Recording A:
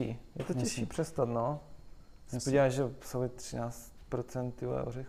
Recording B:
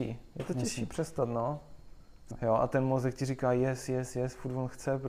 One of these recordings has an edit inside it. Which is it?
B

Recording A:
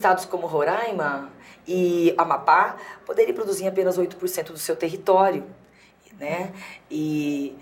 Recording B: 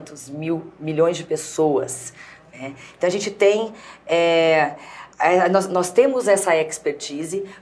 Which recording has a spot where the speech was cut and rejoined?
B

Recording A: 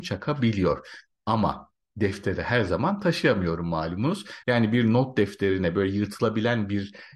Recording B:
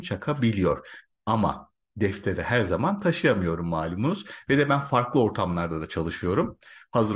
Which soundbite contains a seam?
A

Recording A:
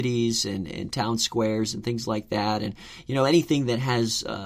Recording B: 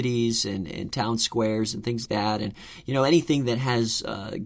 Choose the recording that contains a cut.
B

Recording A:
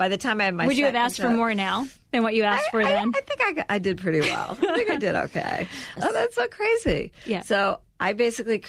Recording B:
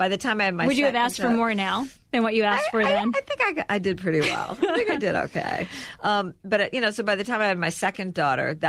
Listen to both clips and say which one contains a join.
A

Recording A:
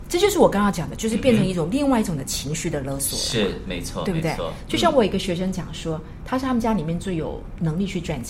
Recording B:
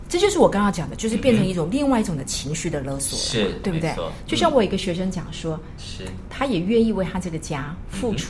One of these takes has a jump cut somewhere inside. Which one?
B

